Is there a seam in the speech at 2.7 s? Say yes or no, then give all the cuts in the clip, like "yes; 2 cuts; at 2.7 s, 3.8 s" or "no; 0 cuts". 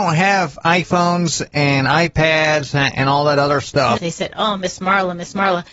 no; 1 cut; at 4.0 s